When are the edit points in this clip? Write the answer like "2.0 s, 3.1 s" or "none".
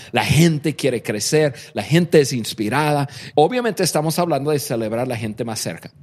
3.3 s